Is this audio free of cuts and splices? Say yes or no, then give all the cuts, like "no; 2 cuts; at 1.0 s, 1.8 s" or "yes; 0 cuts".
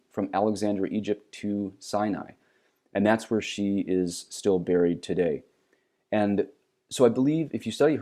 yes; 0 cuts